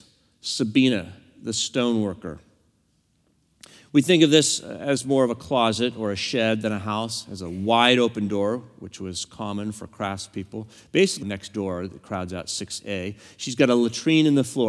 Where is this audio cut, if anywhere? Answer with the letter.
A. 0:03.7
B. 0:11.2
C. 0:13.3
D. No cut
B